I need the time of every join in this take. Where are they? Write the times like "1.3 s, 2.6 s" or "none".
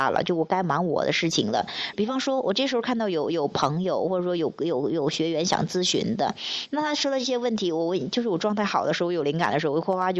1.9 s